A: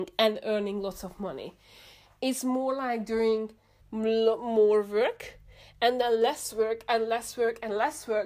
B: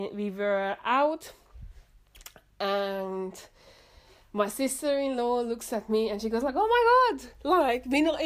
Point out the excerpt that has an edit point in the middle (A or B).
A